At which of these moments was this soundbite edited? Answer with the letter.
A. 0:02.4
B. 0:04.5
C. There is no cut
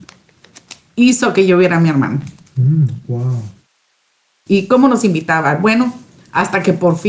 B